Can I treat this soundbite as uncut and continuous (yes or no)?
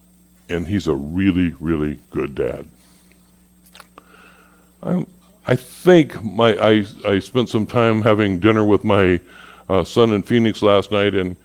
yes